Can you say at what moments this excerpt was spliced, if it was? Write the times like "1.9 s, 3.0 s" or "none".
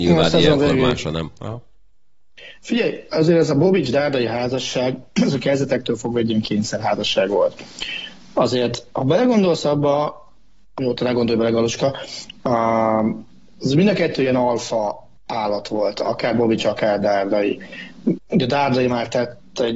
15.2 s, 18.2 s